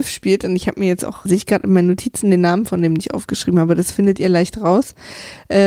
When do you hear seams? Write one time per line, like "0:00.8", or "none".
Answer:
0:01.3